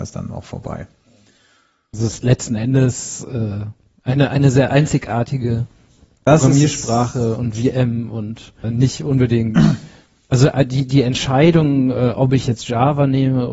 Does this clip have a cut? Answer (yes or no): yes